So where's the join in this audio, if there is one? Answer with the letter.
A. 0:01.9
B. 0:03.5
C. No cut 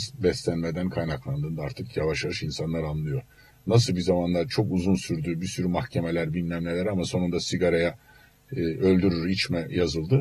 C